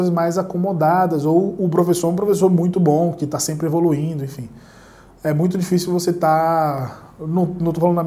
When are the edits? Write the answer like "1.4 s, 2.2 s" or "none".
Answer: none